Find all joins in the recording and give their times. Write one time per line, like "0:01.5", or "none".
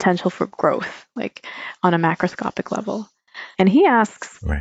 0:03.5

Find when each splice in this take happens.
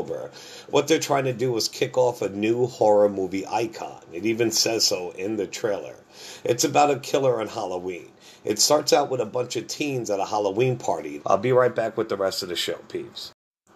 0:11.2

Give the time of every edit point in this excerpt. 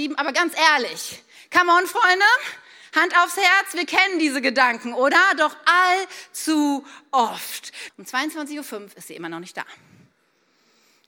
0:07.9

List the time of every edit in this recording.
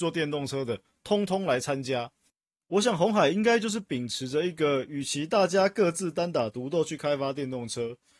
none

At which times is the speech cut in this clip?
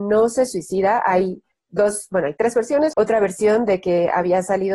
0:02.9

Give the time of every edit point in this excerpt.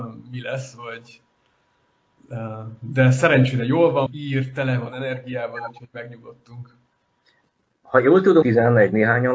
0:04.1
0:08.4

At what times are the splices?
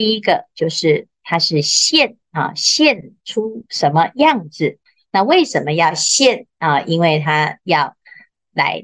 none

